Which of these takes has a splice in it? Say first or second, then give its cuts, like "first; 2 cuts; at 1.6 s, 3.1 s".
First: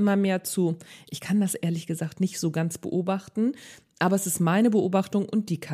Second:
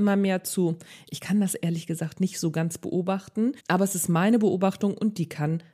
second; 1 cut; at 3.6 s